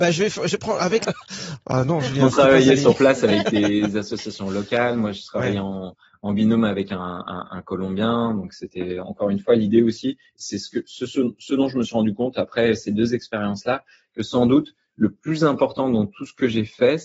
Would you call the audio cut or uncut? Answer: cut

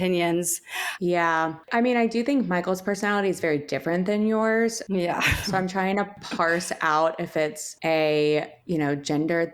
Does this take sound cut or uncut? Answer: cut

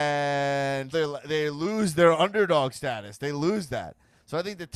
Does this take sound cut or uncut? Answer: cut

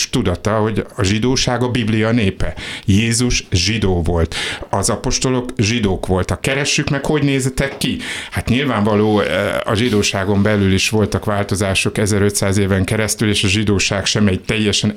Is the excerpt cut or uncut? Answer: uncut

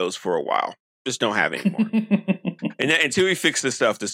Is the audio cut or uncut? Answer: uncut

